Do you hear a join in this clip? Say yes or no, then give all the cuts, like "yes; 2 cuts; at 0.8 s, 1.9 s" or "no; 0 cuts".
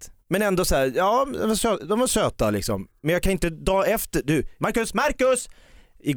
yes; 1 cut; at 4.6 s